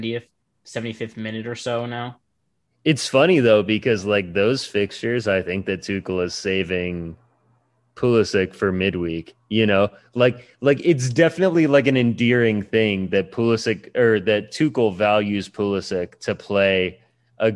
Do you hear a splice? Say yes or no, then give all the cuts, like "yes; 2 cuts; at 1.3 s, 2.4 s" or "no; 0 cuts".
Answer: no; 0 cuts